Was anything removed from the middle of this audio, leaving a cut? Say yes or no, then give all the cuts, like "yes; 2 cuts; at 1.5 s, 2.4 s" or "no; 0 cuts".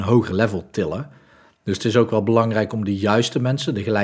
no; 0 cuts